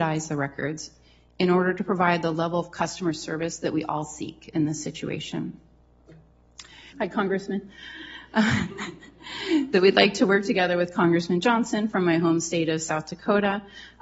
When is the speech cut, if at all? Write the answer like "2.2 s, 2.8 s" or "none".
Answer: 6.9 s, 9.7 s